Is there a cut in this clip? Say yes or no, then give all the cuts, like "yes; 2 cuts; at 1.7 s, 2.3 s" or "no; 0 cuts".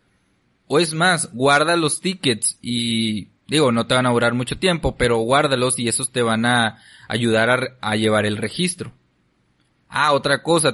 no; 0 cuts